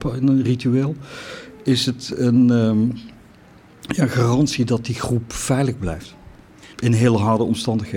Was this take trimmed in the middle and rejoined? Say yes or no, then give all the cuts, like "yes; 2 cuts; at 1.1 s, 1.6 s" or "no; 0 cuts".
yes; 1 cut; at 6.7 s